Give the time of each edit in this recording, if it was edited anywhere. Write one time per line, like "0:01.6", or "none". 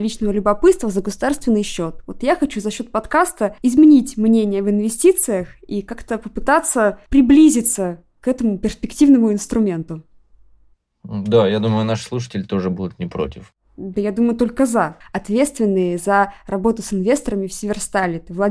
0:15.0